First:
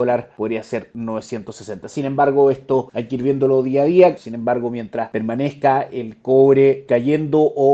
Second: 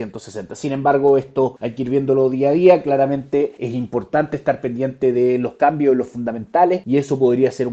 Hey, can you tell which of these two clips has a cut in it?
first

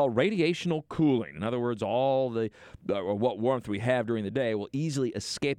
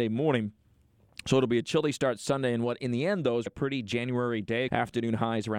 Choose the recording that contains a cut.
second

